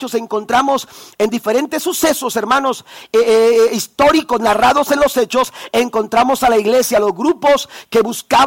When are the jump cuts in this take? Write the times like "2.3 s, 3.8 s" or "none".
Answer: none